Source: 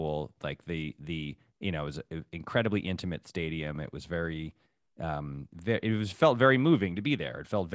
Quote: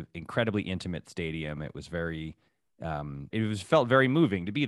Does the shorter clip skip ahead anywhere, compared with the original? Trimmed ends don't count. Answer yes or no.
yes